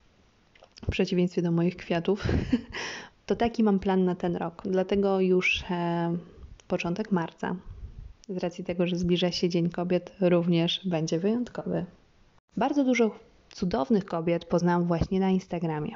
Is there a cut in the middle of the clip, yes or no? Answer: yes